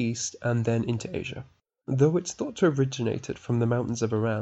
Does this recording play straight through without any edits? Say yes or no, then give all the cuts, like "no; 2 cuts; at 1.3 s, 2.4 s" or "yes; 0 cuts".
yes; 0 cuts